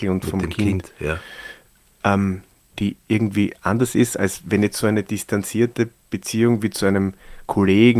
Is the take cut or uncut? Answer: cut